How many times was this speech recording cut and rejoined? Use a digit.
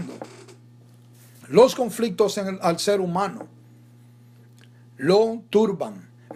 1